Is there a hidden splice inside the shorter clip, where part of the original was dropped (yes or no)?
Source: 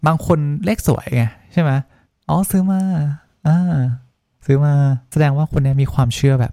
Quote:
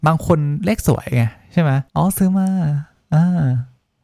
yes